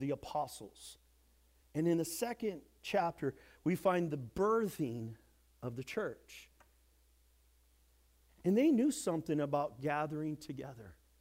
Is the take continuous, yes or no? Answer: yes